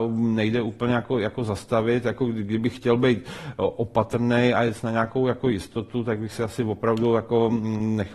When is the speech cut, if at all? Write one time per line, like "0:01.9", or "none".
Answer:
none

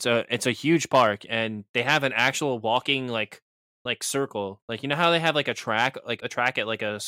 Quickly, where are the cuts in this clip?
0:06.2

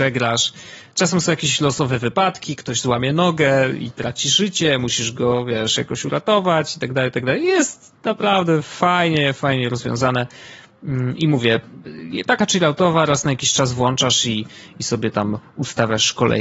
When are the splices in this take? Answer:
none

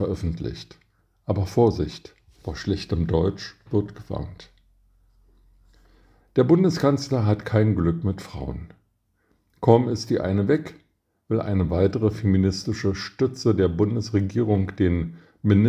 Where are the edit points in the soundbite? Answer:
0:06.2

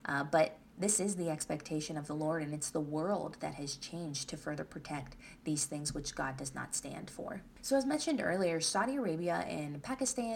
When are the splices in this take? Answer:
none

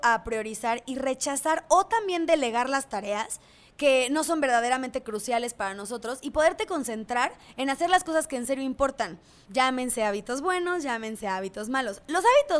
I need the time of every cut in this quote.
0:09.5

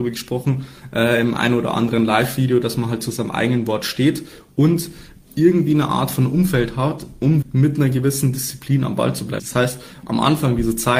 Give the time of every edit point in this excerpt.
0:07.4
0:09.4

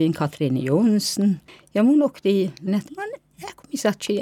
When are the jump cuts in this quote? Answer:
0:02.7

